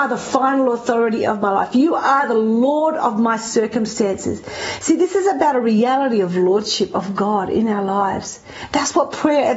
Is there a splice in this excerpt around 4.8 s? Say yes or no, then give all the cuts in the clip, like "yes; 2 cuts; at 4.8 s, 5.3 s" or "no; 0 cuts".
no; 0 cuts